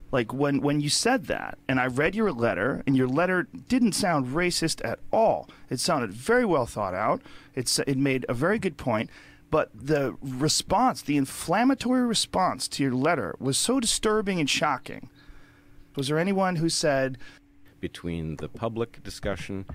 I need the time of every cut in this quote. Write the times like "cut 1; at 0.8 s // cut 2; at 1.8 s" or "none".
cut 1; at 15.9 s

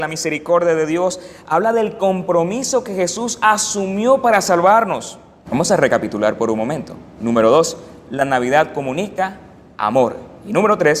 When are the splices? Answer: cut 1; at 5.5 s // cut 2; at 7.2 s

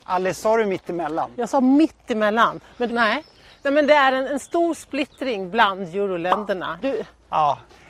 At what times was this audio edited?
cut 1; at 2.9 s // cut 2; at 6.8 s

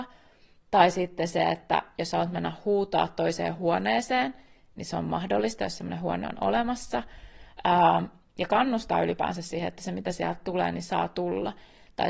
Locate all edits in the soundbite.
none

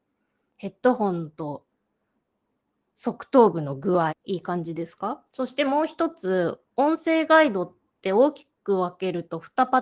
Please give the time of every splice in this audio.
cut 1; at 4.1 s // cut 2; at 5.3 s // cut 3; at 6.7 s

